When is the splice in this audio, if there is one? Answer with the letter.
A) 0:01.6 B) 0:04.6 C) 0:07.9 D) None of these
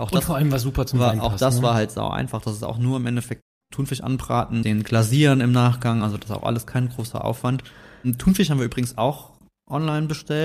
B